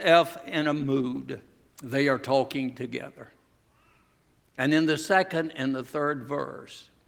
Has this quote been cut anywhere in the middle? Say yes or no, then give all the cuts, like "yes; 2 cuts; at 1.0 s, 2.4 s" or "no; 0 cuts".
yes; 1 cut; at 1.7 s